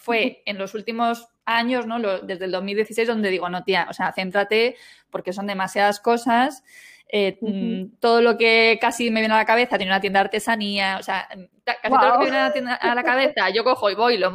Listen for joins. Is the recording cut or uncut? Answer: uncut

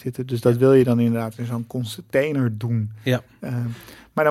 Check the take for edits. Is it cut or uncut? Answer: uncut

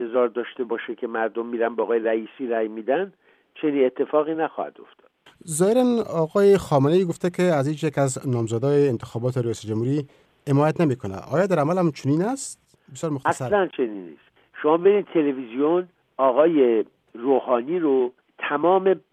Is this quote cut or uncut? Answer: uncut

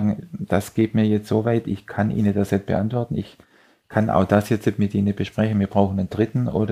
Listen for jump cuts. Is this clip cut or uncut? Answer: uncut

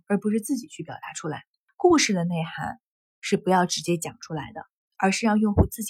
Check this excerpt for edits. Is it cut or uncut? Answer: cut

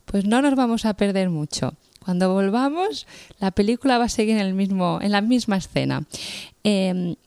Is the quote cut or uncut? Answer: uncut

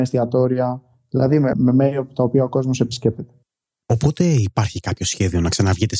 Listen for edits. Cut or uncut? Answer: cut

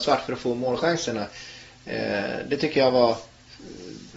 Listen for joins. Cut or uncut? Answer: uncut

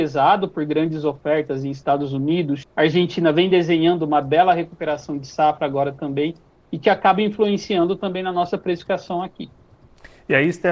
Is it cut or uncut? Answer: cut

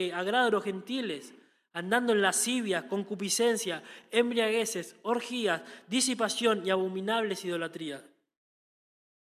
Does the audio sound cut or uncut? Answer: uncut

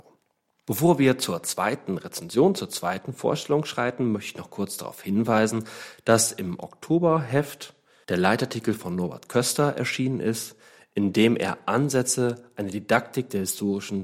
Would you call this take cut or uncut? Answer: uncut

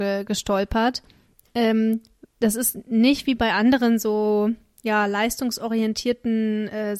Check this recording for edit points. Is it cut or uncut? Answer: uncut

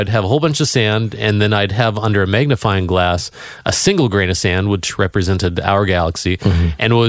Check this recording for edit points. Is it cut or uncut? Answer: uncut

